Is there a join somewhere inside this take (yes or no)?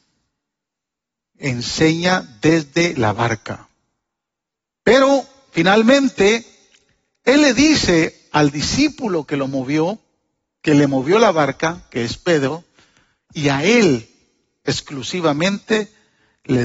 no